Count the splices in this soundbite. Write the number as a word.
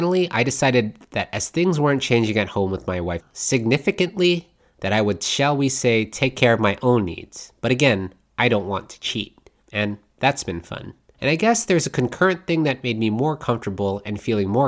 one